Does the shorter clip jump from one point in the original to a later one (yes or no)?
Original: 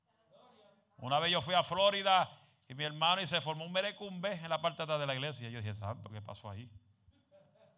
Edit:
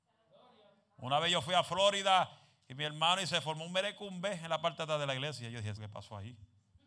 yes